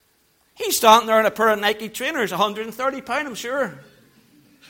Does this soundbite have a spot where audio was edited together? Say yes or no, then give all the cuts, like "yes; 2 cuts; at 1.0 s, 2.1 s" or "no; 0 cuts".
no; 0 cuts